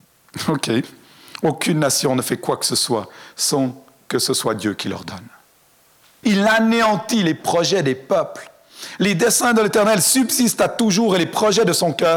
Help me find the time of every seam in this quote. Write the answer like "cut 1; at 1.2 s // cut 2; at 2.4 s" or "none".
cut 1; at 6.2 s